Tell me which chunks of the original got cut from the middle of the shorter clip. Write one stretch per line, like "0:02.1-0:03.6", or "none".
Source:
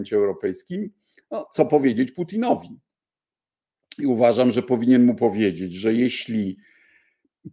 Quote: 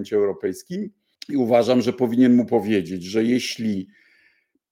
0:01.2-0:03.8